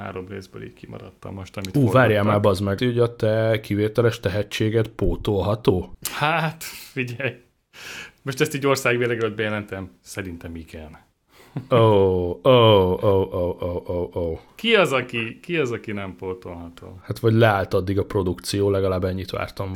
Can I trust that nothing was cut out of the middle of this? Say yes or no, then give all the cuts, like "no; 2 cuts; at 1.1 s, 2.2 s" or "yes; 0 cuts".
no; 1 cut; at 2.8 s